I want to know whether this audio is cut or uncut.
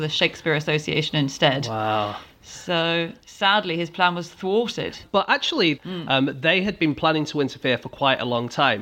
cut